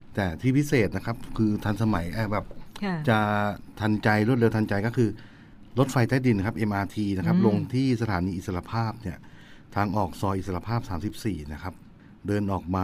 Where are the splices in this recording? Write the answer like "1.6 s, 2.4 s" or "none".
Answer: none